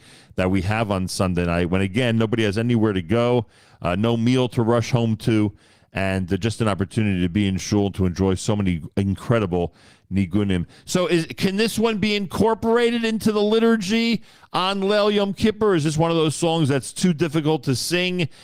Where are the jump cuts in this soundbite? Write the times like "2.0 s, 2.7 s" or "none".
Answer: none